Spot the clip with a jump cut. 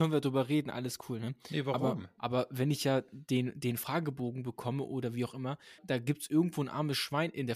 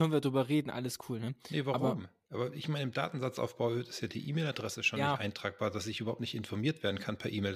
first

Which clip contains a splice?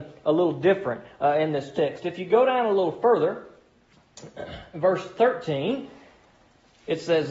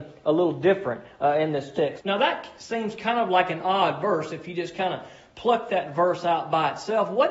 second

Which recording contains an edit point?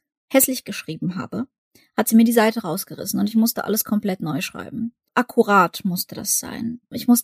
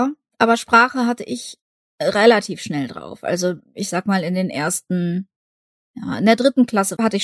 first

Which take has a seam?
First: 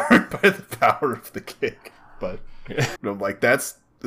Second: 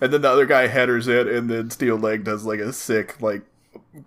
first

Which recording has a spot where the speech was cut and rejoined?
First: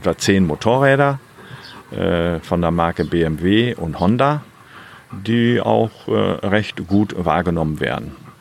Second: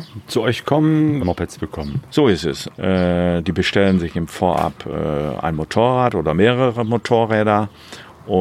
second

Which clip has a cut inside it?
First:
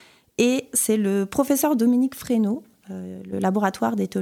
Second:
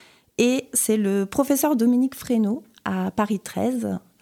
first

